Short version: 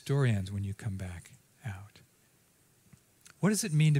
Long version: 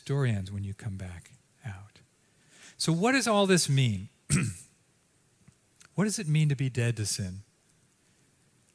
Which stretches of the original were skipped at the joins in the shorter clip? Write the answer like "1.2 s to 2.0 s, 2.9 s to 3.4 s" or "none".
2.3 s to 4.8 s

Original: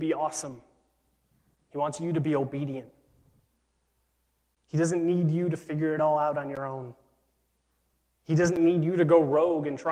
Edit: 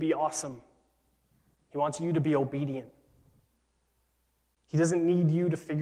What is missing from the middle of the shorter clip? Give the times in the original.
none

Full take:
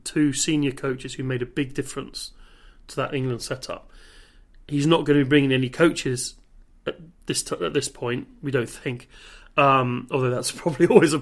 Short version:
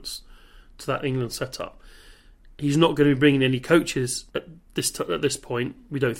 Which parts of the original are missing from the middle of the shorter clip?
6.4 s to 6.8 s

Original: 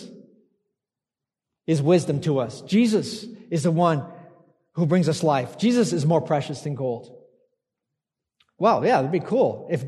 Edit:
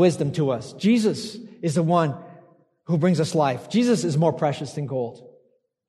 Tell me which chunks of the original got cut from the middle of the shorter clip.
none

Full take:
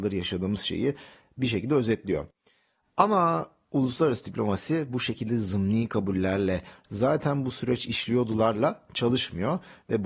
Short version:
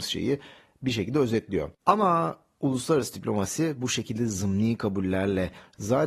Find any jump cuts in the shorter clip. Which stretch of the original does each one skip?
2.3 s to 2.9 s

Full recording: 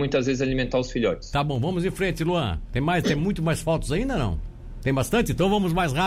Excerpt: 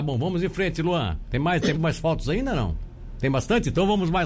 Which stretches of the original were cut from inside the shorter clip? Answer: 3.2 s to 3.4 s

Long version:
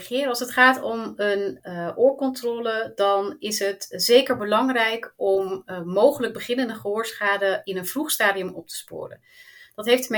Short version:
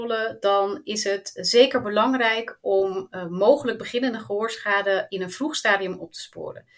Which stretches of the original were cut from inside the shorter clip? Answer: none

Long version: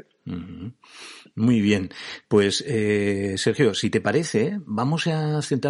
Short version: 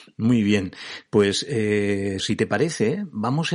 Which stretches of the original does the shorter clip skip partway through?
3.4 s to 3.7 s

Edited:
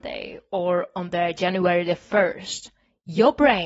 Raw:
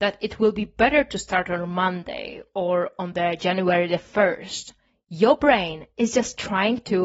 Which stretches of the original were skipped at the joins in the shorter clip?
none

